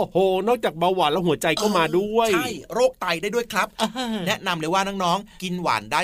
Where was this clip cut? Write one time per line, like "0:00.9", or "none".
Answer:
none